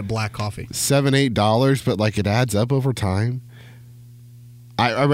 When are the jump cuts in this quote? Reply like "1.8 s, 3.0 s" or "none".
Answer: none